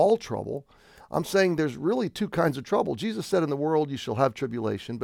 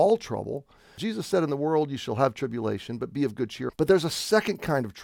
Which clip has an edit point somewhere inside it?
second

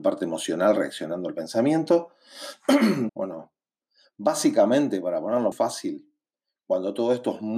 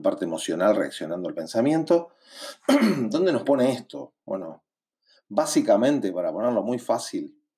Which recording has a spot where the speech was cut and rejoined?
first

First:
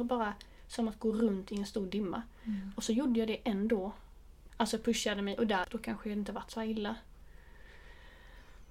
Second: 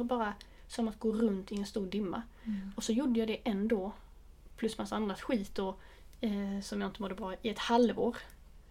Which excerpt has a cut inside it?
first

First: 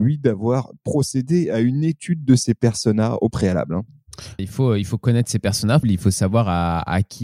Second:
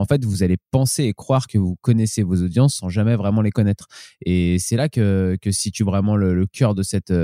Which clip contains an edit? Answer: first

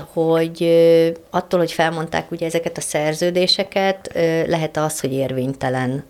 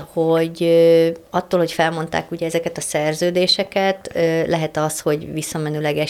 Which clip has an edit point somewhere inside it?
first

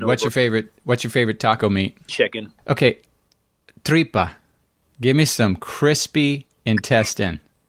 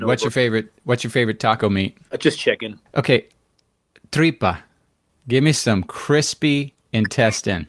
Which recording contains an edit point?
first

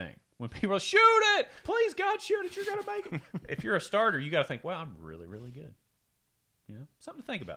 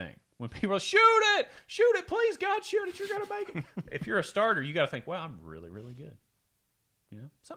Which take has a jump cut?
first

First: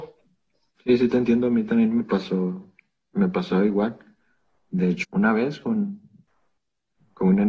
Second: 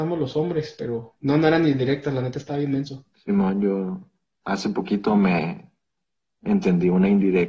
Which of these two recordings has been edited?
first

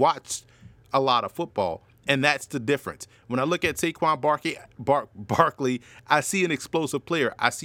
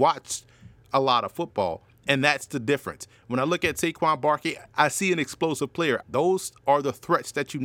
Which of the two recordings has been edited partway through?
second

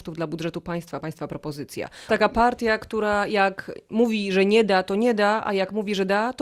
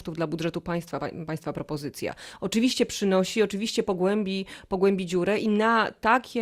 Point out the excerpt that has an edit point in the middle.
first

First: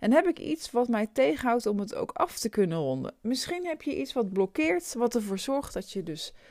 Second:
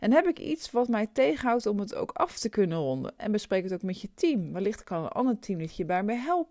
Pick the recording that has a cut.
second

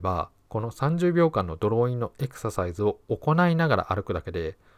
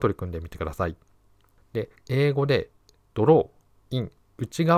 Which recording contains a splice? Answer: second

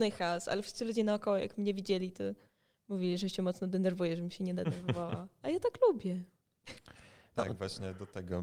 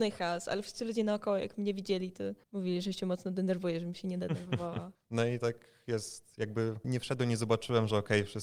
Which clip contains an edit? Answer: second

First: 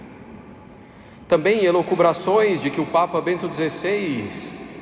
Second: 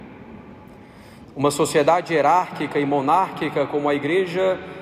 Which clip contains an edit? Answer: second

